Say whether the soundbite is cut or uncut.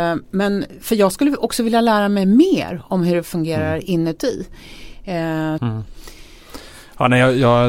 cut